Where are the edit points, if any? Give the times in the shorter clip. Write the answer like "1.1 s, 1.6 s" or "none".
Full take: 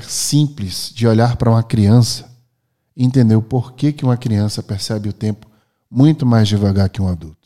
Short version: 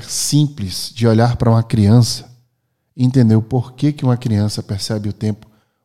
none